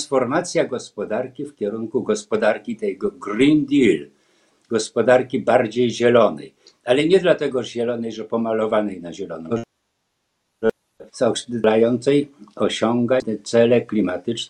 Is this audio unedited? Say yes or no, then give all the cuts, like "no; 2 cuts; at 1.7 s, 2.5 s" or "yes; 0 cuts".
no; 2 cuts; at 9.5 s, 11.1 s